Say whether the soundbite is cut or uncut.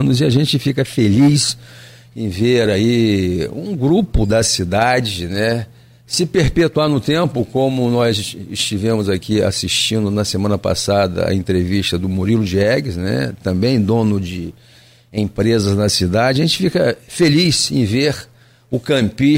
uncut